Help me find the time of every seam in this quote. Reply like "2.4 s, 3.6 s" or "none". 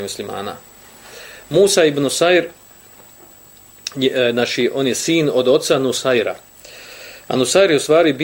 none